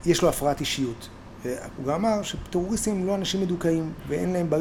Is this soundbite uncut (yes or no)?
no